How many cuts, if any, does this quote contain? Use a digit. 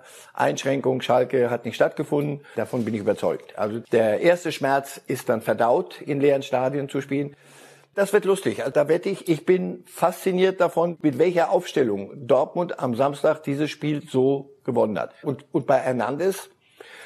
2